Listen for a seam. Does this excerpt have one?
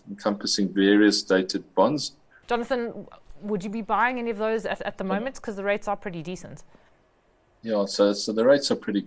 yes; 1 cut; at 2.4 s

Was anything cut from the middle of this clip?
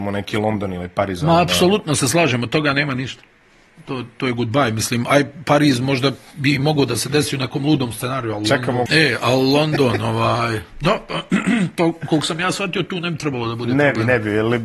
yes; 1 cut; at 8.9 s

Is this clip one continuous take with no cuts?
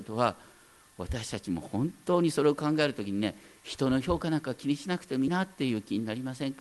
no; 1 cut; at 5.3 s

